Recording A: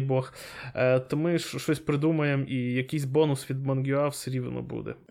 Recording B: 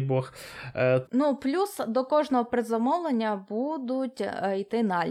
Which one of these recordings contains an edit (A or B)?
B